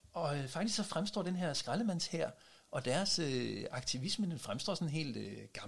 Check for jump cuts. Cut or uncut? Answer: uncut